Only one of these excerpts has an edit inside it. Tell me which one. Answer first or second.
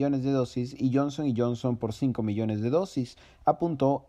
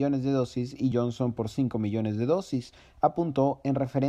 second